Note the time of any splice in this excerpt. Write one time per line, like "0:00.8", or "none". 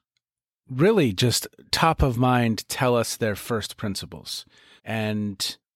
0:04.8